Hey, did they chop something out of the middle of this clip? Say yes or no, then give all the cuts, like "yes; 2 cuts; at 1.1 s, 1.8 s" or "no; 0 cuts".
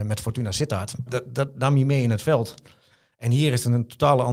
yes; 1 cut; at 1.1 s